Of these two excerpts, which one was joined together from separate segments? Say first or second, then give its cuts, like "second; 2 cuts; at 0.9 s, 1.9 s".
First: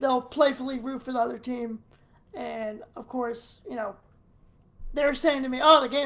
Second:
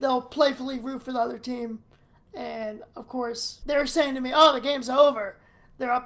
second; 1 cut; at 3.6 s